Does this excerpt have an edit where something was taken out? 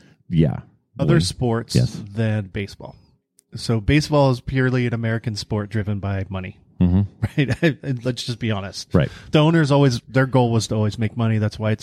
yes; 1 cut; at 1.0 s

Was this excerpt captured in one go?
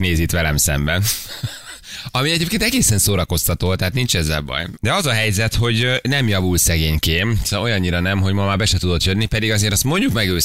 no; 1 cut; at 4.7 s

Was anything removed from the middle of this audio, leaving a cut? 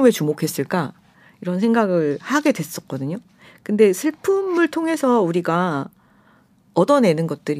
no; 0 cuts

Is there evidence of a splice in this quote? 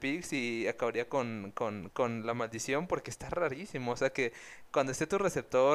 yes; 1 cut; at 1.9 s

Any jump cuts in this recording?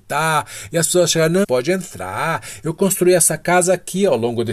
yes; 1 cut; at 1.4 s

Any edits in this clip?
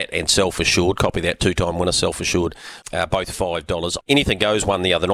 yes; 2 cuts; at 2.8 s, 4.0 s

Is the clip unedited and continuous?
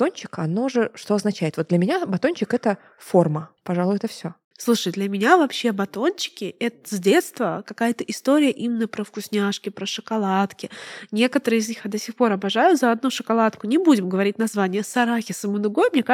no; 1 cut; at 3.6 s

